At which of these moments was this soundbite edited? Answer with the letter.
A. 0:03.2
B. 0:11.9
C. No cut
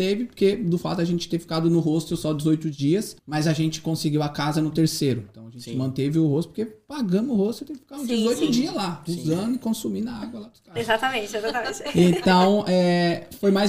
A